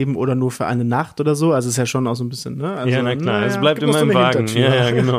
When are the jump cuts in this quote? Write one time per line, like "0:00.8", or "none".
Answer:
none

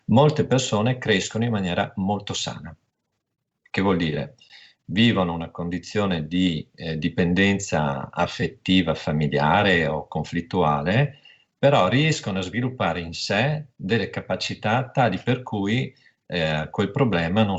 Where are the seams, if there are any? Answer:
none

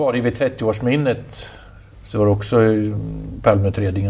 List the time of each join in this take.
none

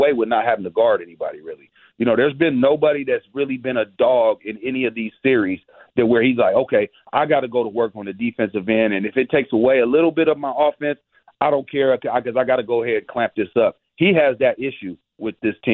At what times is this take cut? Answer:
none

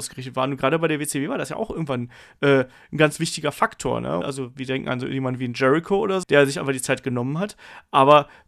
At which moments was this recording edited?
0:04.2
0:06.2

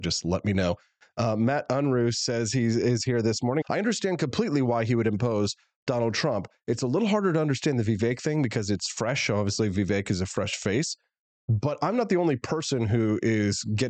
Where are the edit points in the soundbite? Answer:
0:03.6

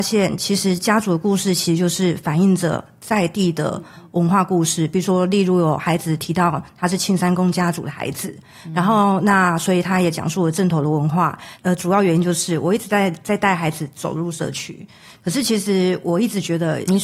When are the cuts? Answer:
0:11.6

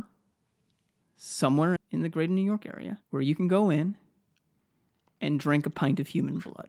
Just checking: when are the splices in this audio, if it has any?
0:01.8
0:03.0

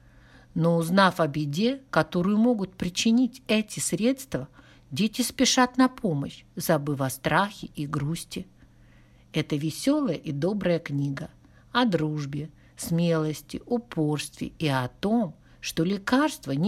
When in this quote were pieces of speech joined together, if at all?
none

